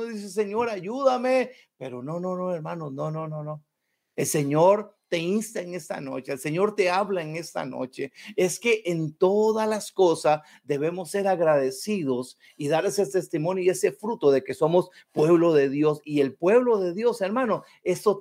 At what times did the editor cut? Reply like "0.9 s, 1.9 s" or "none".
none

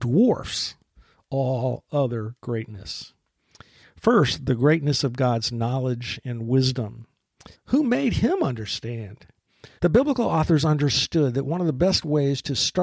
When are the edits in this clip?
7.5 s, 9.8 s

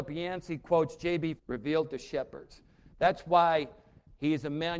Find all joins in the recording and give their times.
1.4 s

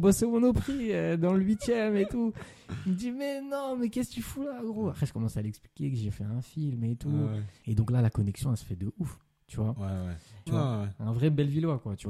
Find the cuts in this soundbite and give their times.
7.6 s, 10.5 s

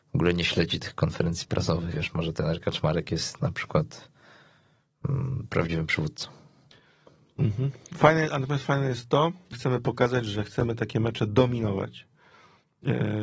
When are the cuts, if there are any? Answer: 1.9 s, 9.5 s

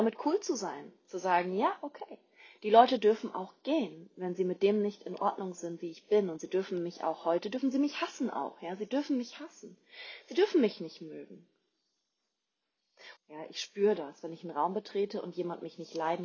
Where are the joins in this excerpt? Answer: 13.2 s

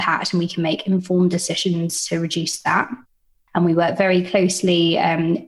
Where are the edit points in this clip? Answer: 3.5 s

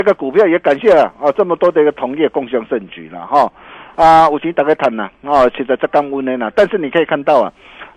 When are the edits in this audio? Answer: none

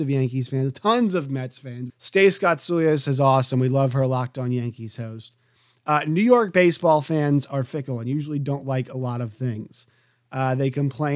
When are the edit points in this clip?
1.9 s

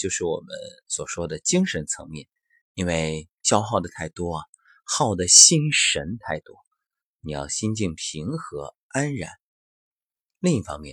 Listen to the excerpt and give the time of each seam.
2.6 s, 7.1 s

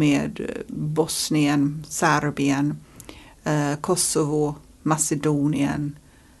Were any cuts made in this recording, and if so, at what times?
none

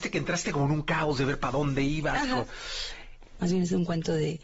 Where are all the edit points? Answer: 3.4 s

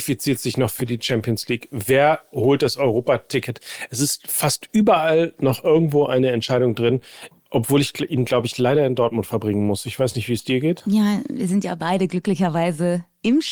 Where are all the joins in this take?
7.3 s

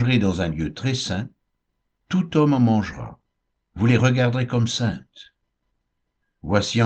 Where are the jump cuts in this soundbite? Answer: none

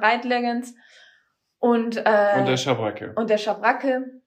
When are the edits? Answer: none

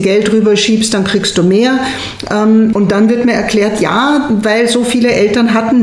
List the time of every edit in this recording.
2.7 s

